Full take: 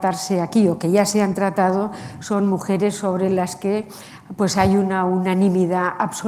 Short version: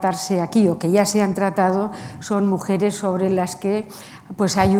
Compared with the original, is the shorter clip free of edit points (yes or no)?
yes